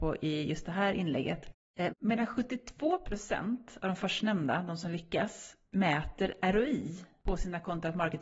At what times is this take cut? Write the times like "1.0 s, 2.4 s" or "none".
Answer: 1.9 s